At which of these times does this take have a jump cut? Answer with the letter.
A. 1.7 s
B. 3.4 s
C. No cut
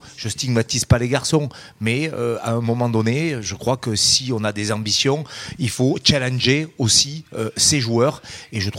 C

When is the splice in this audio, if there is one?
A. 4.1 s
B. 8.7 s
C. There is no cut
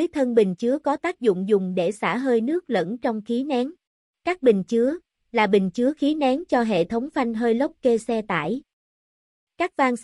A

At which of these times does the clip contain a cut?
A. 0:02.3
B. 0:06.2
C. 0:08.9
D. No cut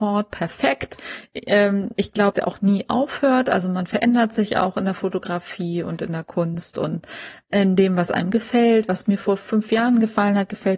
A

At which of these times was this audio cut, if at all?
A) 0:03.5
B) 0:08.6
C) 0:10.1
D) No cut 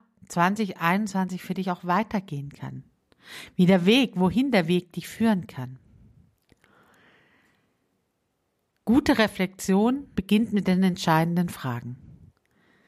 C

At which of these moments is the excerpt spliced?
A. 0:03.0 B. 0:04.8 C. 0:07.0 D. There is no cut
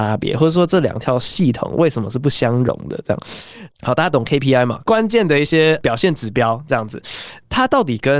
D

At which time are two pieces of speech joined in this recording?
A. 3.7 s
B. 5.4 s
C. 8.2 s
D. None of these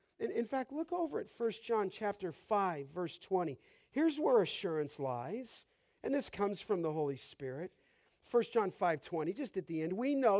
D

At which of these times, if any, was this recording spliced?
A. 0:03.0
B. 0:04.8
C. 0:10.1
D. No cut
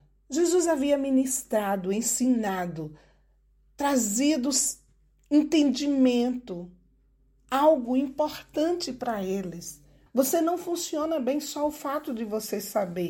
C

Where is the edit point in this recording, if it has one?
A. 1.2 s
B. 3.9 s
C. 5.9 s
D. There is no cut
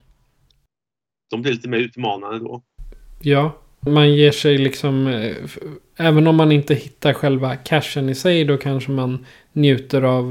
B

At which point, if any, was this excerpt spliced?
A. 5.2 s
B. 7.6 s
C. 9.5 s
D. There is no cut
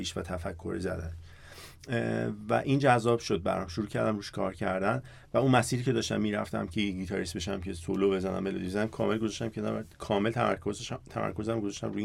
D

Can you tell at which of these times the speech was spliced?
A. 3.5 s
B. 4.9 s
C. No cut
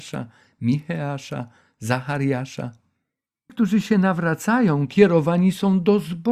A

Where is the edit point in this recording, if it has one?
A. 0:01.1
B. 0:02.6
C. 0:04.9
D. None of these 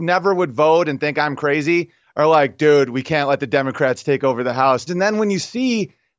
C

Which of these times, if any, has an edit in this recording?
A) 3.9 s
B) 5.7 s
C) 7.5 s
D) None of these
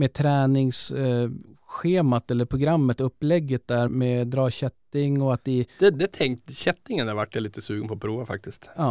A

